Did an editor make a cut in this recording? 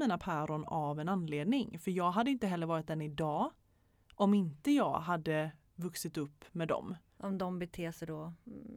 yes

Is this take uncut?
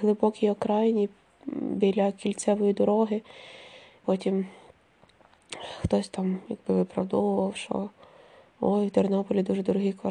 no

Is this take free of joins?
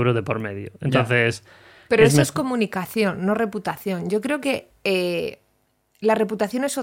yes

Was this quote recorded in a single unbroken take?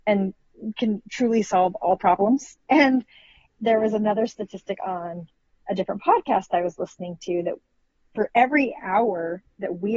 yes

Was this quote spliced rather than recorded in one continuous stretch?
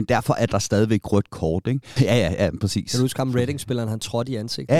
yes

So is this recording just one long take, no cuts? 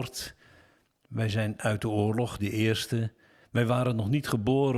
no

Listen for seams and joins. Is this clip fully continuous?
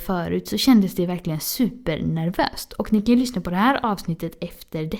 yes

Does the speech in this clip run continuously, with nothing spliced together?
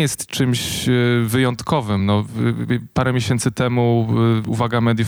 yes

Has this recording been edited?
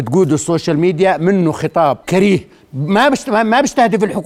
yes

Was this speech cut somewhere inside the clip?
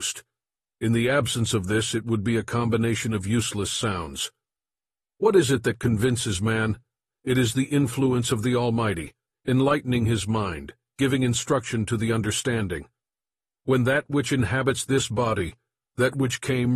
no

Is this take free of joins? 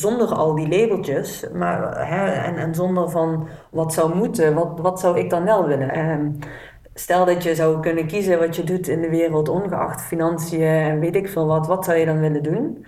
no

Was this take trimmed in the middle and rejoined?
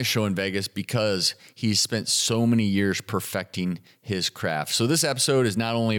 no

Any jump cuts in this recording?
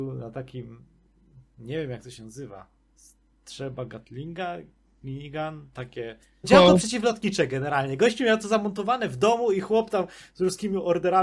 yes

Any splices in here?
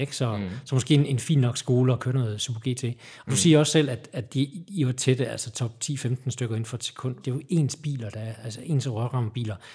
yes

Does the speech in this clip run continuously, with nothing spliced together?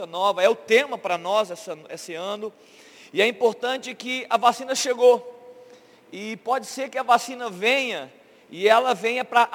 yes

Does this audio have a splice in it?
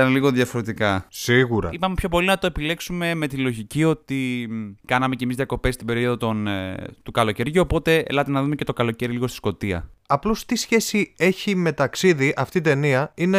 no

